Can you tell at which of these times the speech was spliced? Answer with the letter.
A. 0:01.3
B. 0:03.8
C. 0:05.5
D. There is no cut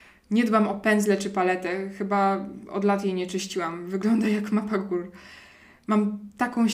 D